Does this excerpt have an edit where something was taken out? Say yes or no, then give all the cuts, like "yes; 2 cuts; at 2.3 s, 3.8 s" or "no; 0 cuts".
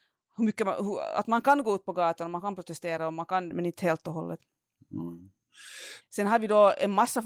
yes; 2 cuts; at 3.5 s, 6.0 s